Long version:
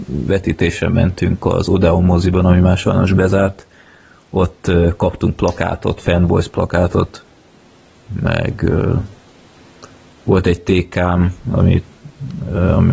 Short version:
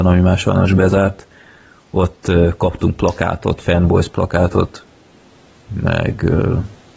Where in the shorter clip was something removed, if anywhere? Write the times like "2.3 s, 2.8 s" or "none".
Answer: none